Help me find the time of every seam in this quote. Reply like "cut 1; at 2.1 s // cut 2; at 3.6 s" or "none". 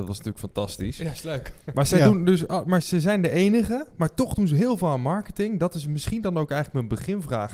cut 1; at 2.8 s